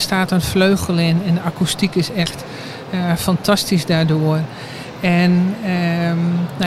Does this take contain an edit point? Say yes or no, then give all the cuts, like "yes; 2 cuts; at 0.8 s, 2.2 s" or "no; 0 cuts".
no; 0 cuts